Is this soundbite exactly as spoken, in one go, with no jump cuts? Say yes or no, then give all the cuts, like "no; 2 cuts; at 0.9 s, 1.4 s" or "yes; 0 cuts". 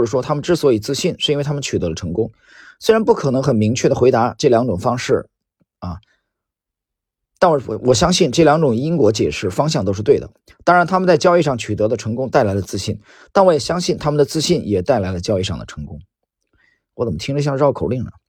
yes; 0 cuts